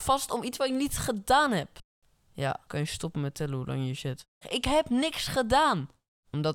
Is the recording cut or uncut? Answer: cut